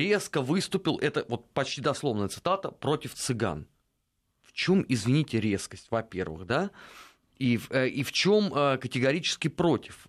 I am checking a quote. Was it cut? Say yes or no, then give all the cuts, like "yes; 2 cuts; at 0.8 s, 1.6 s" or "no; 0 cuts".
no; 0 cuts